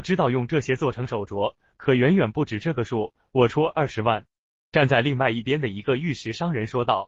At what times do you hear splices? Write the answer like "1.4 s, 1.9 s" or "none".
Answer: none